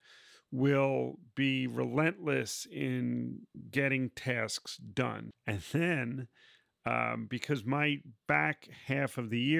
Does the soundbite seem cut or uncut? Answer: cut